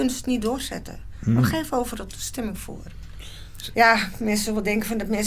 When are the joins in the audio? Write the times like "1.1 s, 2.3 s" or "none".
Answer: 3.7 s